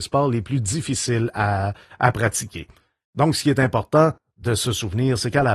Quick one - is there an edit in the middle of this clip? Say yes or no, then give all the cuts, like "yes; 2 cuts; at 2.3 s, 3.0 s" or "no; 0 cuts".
no; 0 cuts